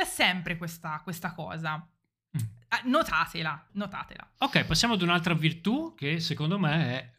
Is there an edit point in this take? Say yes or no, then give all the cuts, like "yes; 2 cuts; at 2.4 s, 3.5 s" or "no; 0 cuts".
yes; 1 cut; at 3.7 s